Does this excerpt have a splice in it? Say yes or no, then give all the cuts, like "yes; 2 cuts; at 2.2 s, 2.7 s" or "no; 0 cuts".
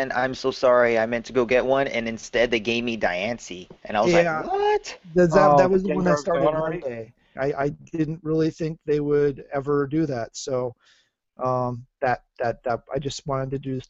yes; 1 cut; at 7.4 s